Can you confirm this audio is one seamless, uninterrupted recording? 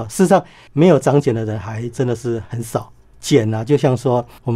no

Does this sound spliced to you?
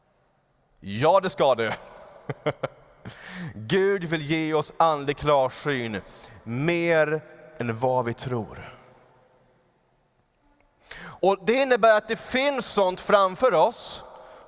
no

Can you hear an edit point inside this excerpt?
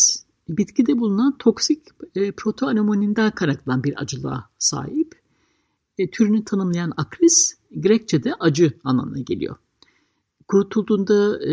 no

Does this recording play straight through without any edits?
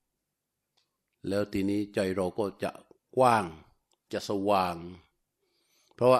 yes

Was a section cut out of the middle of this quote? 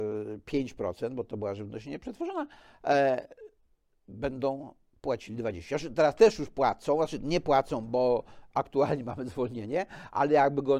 no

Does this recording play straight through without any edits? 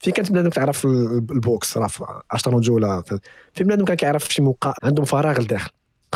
no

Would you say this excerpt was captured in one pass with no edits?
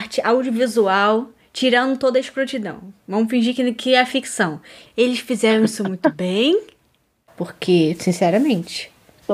no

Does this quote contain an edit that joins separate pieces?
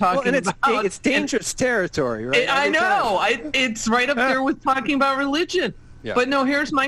no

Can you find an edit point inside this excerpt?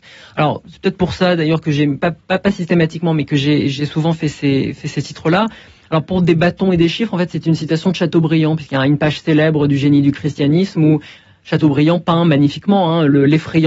no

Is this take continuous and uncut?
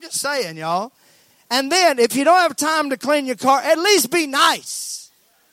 yes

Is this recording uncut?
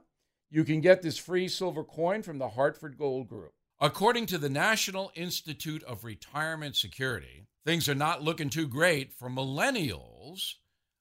no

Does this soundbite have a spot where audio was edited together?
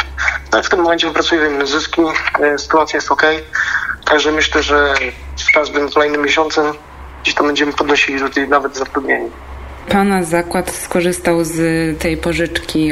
no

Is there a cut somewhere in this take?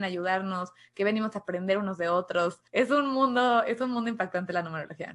yes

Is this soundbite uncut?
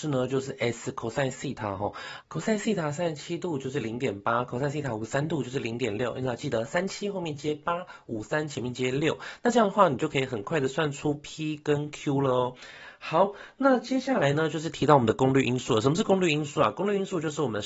yes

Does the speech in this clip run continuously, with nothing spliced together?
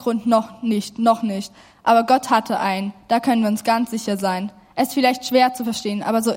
yes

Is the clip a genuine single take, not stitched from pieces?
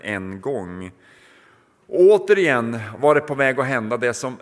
yes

